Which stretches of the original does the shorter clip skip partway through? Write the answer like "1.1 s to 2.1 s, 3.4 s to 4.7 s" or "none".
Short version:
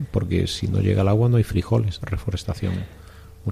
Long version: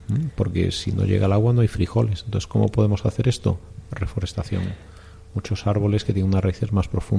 2.2 s to 3.9 s